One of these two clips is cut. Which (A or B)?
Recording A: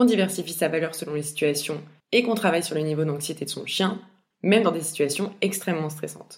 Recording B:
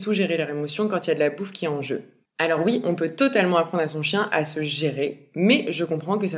A